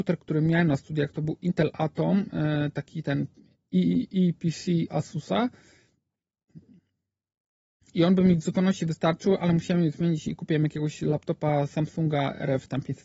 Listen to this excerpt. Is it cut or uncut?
uncut